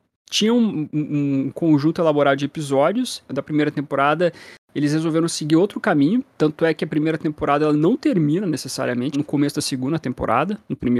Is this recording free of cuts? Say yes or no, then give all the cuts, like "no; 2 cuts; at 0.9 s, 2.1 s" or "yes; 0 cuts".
no; 2 cuts; at 3.3 s, 9.1 s